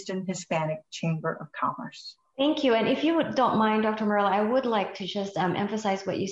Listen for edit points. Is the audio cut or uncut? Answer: uncut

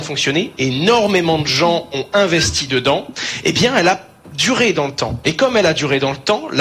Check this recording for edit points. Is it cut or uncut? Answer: uncut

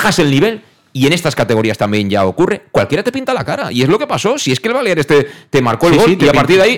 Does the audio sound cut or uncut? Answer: uncut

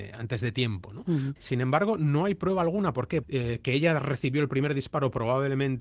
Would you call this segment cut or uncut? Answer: cut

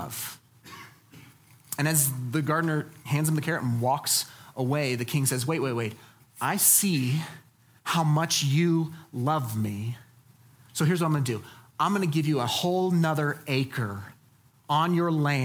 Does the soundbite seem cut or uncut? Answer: uncut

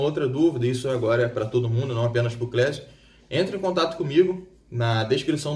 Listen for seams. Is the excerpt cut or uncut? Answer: uncut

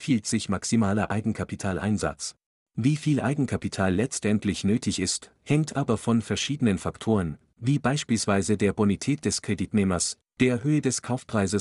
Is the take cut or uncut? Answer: cut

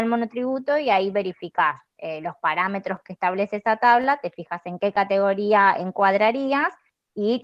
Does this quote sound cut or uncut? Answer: uncut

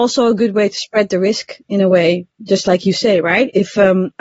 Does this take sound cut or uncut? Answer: uncut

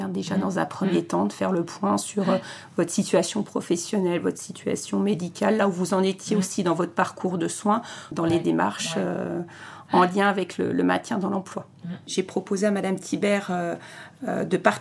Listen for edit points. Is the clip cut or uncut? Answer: cut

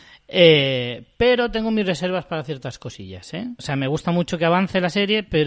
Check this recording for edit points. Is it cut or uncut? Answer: cut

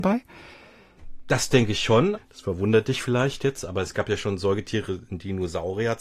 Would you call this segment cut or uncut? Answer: cut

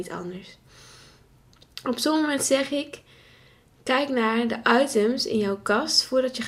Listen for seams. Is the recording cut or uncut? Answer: uncut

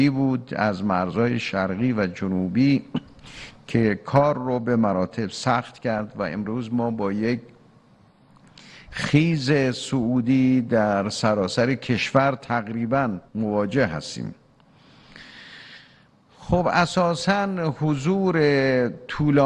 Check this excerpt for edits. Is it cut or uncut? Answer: cut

